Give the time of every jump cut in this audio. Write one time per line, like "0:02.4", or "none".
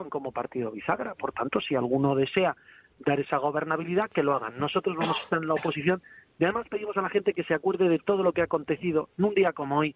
none